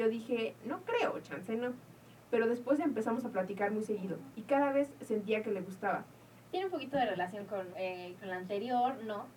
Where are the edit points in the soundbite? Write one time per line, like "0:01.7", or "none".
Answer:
0:04.3
0:06.5
0:07.7

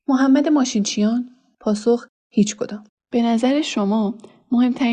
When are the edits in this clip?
0:03.0

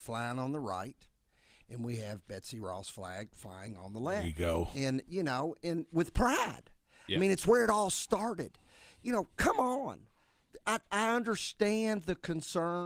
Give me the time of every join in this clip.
none

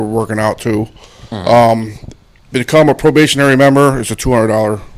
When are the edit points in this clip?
none

